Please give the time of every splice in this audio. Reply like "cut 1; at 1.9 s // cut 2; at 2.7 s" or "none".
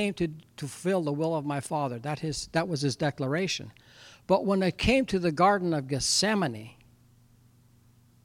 none